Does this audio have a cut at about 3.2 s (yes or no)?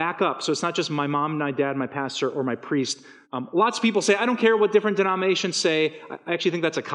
yes